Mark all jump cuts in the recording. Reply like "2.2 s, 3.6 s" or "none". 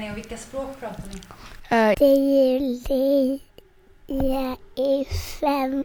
1.9 s